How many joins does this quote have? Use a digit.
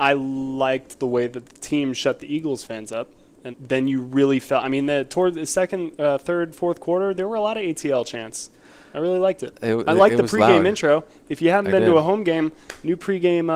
1